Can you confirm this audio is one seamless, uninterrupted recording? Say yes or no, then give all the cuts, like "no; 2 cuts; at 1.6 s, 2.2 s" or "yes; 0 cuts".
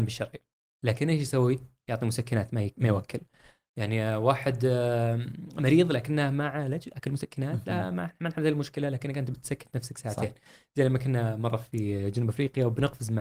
yes; 0 cuts